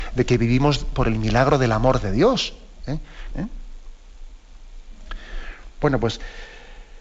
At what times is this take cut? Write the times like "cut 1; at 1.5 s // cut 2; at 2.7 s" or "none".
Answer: cut 1; at 3.3 s